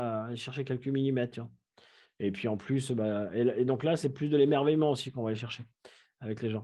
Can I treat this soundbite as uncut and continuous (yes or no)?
yes